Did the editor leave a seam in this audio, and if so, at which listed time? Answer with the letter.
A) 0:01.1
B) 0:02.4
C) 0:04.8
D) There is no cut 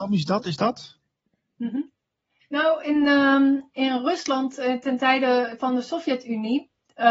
B